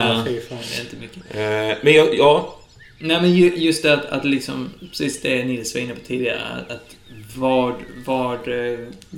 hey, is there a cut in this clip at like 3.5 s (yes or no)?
no